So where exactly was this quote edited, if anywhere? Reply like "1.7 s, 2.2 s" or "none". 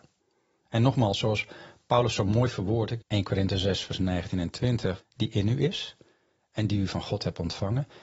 3.0 s, 5.0 s